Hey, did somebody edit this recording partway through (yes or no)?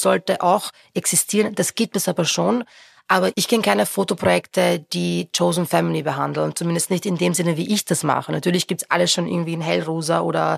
no